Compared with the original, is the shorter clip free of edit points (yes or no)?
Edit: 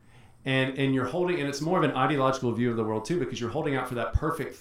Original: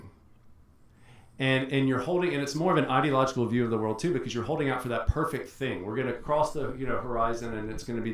yes